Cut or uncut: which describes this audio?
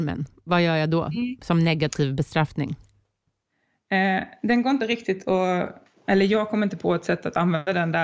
uncut